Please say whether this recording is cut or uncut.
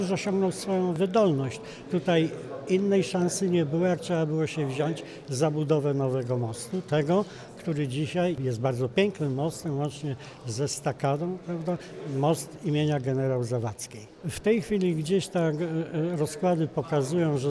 uncut